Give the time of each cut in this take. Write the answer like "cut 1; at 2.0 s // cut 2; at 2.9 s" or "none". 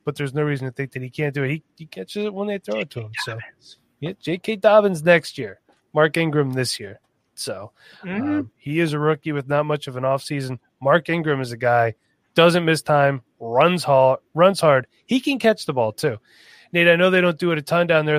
cut 1; at 8.5 s